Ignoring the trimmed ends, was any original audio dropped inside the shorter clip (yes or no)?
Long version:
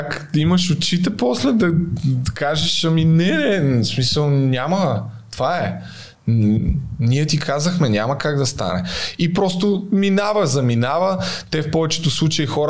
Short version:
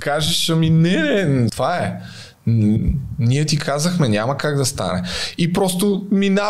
yes